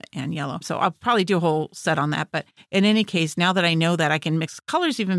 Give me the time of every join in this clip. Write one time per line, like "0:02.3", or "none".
none